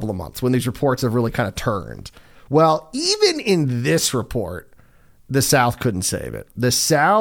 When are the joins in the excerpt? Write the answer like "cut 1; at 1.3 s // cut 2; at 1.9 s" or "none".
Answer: none